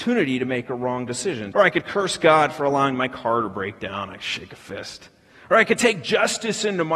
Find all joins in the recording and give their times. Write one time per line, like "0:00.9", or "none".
0:01.5